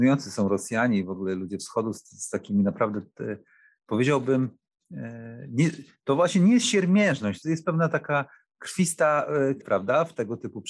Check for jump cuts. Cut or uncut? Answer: cut